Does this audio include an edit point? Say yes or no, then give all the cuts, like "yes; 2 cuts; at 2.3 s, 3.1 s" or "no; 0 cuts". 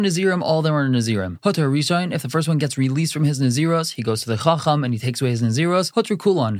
no; 0 cuts